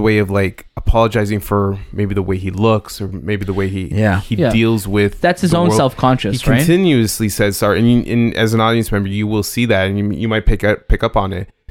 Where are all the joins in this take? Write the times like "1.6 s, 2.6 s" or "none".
none